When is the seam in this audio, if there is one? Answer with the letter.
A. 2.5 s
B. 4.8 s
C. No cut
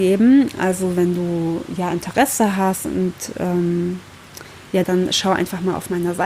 B